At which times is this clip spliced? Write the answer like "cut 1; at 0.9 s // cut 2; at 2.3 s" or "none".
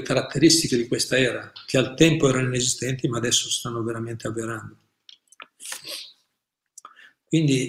none